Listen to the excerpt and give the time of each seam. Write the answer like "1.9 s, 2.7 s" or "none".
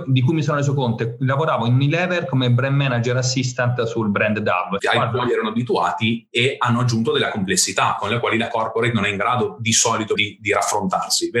4.8 s, 10.2 s